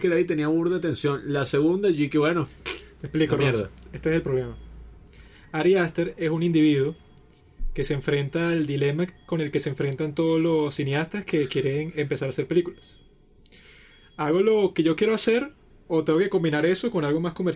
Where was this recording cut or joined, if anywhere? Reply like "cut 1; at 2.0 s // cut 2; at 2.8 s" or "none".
none